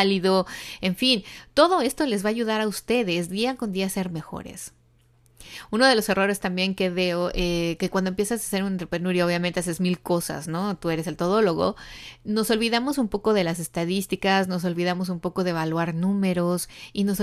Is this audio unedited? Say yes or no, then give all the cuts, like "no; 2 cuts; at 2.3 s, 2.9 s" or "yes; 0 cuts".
yes; 0 cuts